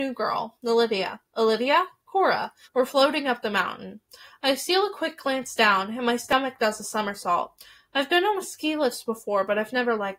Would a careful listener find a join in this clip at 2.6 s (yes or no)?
yes